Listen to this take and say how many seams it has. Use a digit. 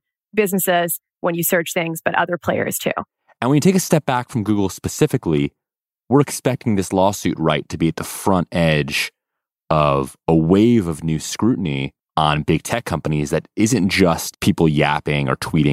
1